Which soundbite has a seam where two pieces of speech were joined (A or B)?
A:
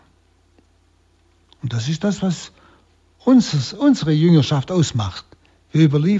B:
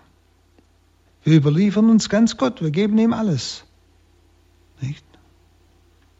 B